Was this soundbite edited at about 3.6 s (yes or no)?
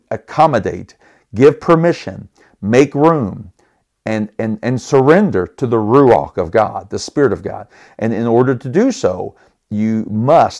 no